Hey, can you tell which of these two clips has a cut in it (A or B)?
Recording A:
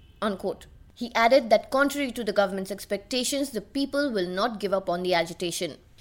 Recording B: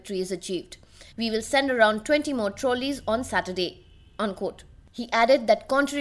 B